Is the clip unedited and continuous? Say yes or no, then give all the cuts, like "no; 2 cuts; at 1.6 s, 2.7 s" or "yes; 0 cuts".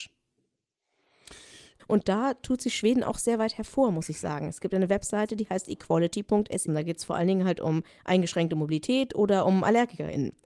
no; 2 cuts; at 1.8 s, 6.7 s